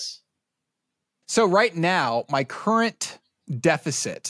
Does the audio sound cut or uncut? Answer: cut